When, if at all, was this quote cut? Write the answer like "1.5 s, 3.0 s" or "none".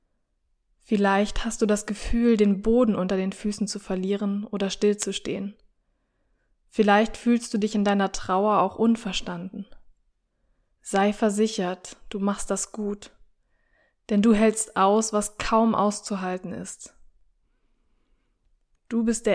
none